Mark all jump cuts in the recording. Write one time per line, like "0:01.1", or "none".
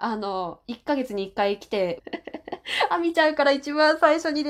0:02.0